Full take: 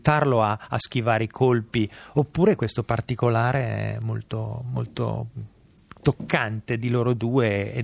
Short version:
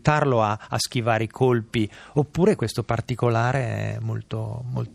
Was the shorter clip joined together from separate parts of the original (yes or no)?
no